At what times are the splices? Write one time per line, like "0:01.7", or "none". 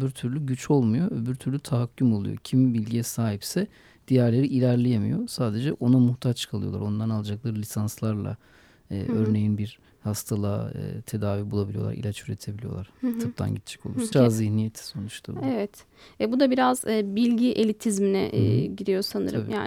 0:14.1